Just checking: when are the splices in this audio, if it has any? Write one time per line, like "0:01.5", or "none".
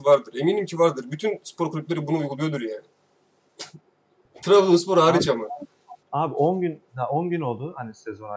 0:06.0